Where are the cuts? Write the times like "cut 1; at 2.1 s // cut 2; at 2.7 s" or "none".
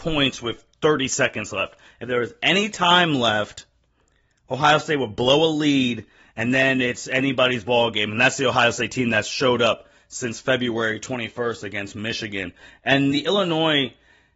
cut 1; at 13.1 s